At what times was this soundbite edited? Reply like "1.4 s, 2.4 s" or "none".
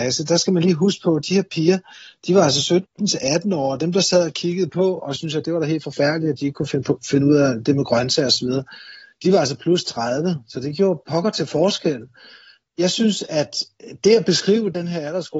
none